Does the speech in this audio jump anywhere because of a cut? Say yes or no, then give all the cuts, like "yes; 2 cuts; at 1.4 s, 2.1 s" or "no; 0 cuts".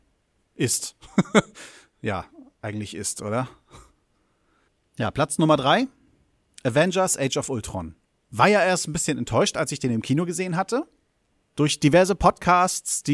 no; 0 cuts